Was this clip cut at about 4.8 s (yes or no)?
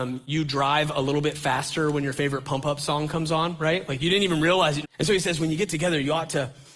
yes